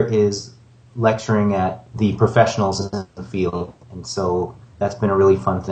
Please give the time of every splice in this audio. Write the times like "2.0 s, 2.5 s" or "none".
1.9 s, 3.8 s